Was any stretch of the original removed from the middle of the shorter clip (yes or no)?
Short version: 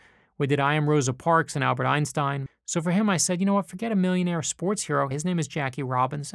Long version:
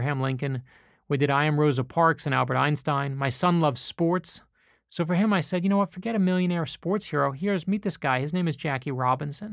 yes